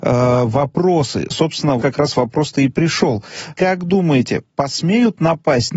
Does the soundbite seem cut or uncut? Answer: cut